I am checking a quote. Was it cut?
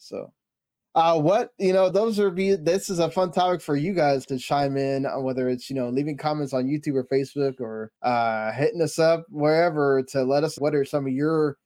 yes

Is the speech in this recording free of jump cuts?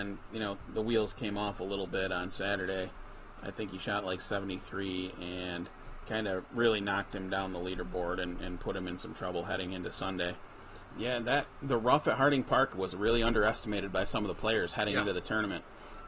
no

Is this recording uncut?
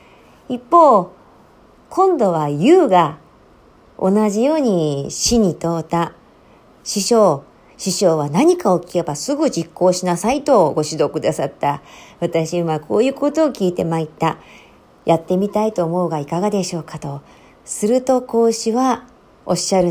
yes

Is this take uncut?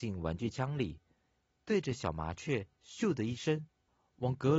yes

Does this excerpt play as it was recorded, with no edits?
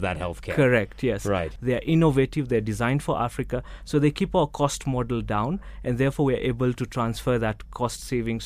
no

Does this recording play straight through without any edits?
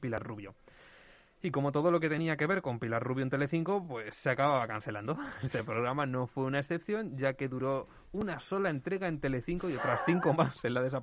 yes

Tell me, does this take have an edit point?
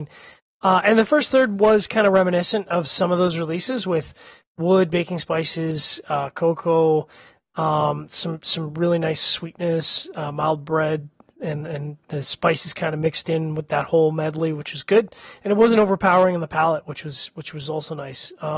no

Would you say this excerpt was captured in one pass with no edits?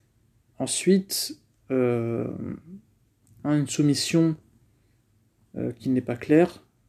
no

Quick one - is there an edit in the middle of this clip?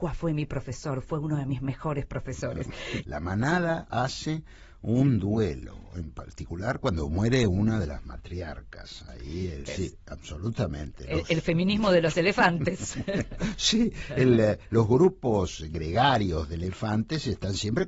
yes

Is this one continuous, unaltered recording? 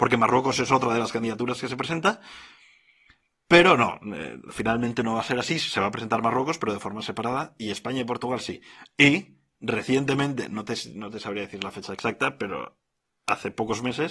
yes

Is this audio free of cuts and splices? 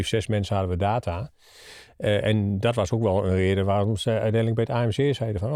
yes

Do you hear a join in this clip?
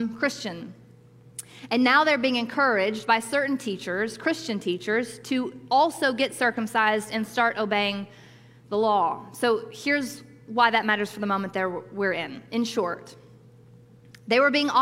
no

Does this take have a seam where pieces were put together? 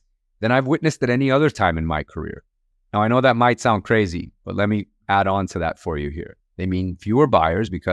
yes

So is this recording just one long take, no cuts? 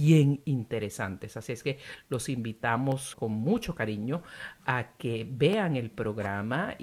no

